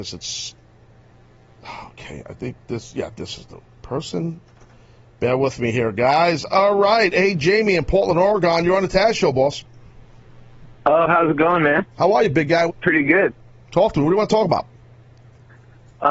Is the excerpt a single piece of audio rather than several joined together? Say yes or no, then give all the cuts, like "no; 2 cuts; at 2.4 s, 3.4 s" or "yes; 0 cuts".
no; 1 cut; at 12.7 s